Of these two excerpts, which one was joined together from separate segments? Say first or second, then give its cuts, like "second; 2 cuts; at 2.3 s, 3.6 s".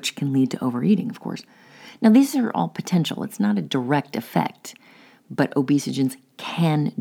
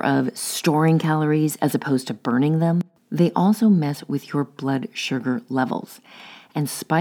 second; 1 cut; at 3.0 s